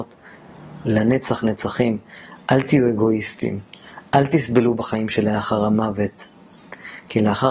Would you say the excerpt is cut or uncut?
cut